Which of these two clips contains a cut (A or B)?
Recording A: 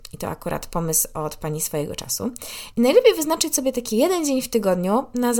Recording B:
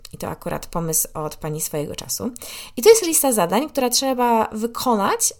A